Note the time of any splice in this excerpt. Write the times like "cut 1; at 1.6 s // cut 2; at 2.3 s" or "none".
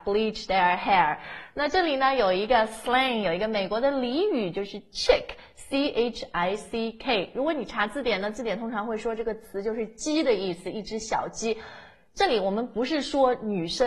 none